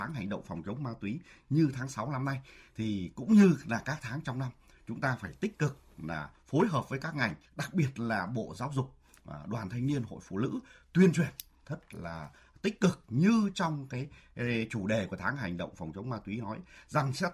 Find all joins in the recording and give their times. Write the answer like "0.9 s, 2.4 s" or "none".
7.5 s